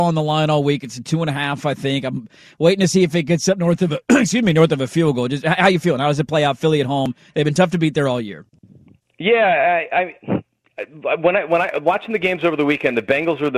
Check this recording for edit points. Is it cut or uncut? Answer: cut